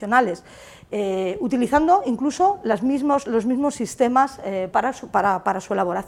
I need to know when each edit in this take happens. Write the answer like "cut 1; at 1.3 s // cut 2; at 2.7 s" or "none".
cut 1; at 4.7 s